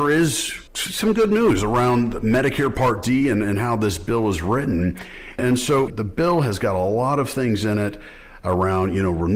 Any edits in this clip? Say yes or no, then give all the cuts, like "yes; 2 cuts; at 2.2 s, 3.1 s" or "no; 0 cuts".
yes; 1 cut; at 5.9 s